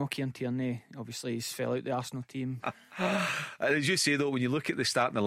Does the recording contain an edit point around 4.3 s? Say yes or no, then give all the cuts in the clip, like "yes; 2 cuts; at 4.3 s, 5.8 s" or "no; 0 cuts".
no; 1 cut; at 2.6 s